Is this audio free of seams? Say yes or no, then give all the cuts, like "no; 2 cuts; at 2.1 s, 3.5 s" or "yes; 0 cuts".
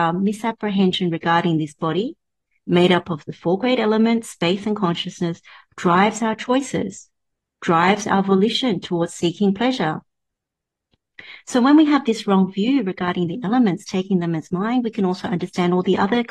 yes; 0 cuts